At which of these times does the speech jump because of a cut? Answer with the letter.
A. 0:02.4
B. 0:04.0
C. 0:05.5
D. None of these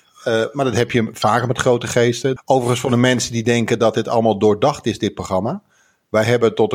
A